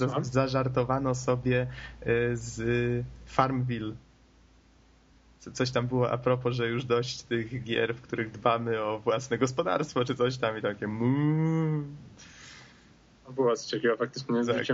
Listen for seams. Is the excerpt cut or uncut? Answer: uncut